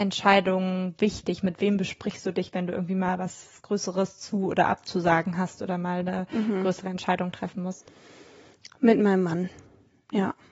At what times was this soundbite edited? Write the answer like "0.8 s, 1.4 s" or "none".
none

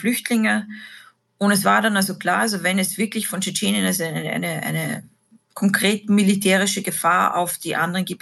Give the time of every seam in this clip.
none

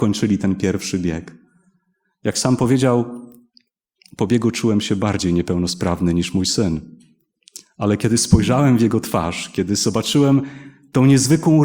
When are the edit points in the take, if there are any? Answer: none

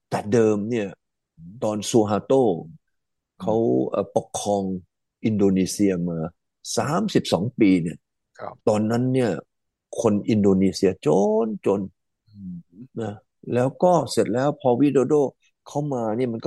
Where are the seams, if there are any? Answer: 8.6 s

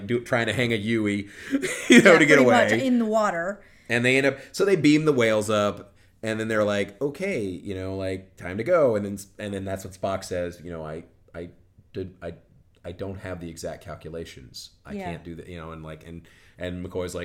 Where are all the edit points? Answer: none

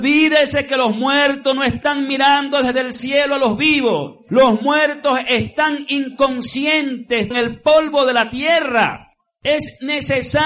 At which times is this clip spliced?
7.3 s

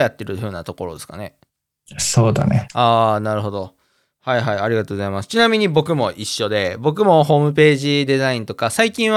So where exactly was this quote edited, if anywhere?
none

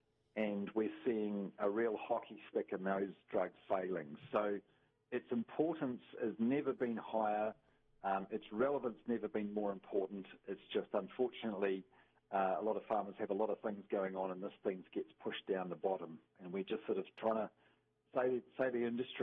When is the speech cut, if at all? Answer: 3.6 s

